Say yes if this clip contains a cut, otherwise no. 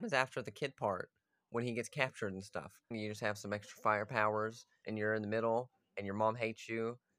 yes